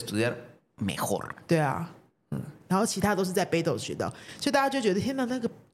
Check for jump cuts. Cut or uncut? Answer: cut